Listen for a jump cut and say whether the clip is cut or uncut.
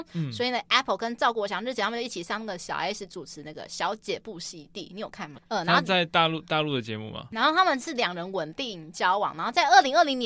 cut